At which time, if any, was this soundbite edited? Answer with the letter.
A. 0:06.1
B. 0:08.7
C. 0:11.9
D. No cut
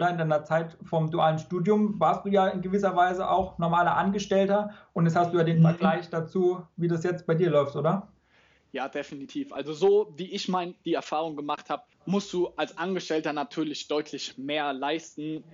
C